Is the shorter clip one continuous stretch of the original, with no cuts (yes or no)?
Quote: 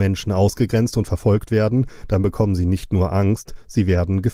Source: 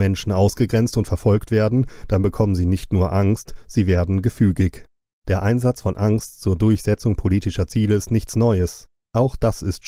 yes